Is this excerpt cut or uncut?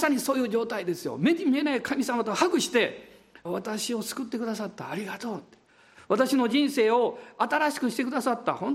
cut